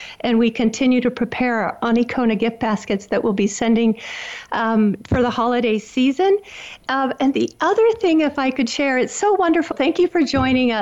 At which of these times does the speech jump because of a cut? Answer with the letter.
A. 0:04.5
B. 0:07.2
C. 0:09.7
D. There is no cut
C